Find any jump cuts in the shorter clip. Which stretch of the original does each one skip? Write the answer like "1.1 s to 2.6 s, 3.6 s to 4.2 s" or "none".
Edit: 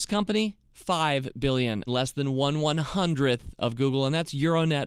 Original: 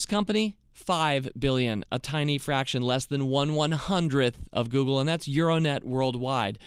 1.9 s to 2.8 s